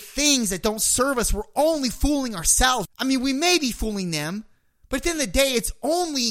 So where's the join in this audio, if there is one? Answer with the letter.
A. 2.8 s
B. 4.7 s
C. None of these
A